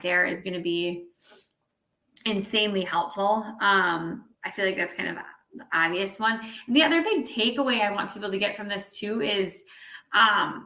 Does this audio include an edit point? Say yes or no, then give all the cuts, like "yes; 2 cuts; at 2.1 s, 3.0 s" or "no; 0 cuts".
yes; 1 cut; at 4.3 s